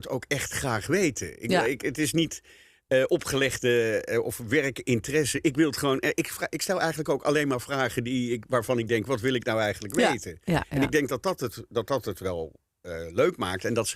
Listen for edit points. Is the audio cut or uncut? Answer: uncut